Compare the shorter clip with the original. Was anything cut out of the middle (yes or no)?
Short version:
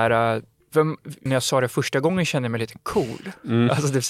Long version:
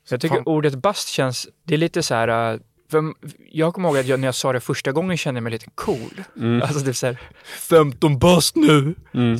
yes